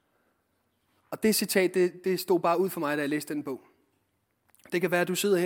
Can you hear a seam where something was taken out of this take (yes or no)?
no